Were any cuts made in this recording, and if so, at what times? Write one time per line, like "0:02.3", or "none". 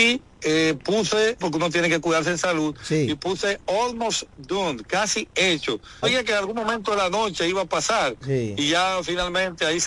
0:01.4
0:06.0